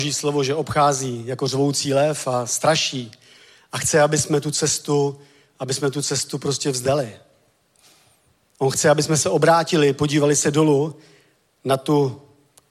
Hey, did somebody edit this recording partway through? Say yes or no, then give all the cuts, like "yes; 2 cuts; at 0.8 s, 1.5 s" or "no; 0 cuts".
no; 0 cuts